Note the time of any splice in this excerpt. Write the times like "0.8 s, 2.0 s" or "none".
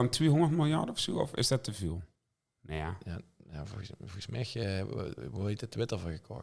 none